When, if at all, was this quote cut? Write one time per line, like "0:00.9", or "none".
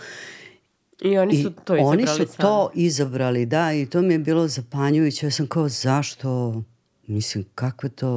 none